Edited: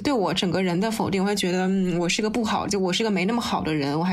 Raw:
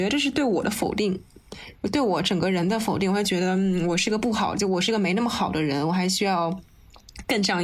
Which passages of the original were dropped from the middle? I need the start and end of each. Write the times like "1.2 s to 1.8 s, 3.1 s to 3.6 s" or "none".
none